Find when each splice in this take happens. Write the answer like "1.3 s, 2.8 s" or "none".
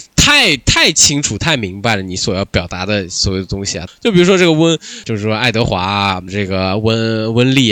3.9 s, 5.0 s, 6.3 s